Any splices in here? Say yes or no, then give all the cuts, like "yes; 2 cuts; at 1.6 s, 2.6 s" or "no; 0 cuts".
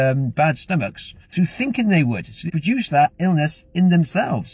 yes; 2 cuts; at 1.2 s, 2.5 s